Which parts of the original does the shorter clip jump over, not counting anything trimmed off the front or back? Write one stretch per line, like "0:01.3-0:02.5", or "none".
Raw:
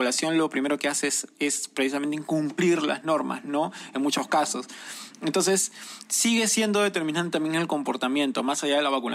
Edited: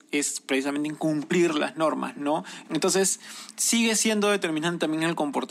0:03.9-0:05.2

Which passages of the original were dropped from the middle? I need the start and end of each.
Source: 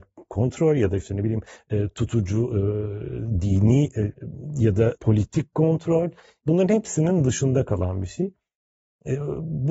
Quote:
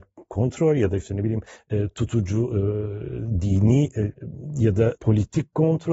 none

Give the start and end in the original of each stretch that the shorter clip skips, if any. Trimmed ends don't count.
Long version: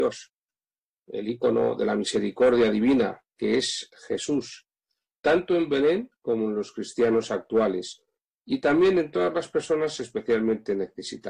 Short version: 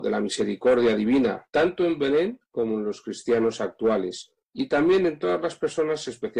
0:03.3-0:05.2
0:08.1-0:08.3

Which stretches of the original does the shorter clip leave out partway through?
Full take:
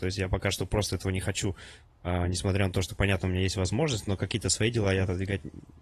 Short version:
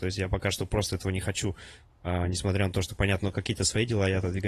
0:03.2-0:04.0

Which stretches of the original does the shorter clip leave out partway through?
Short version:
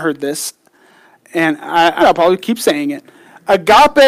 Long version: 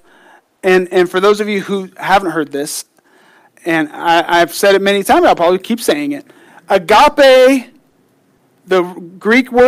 0:04.3-0:05.2

